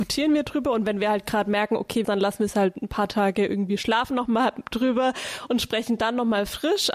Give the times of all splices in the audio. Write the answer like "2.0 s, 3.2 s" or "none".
2.0 s